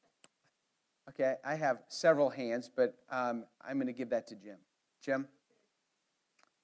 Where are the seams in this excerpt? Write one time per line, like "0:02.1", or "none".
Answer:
none